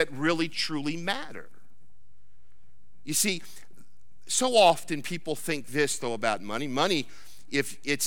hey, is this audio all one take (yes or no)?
yes